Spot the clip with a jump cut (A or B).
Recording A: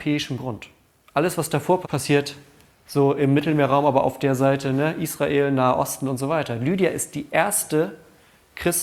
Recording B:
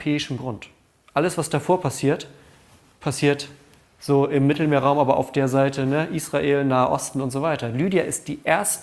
A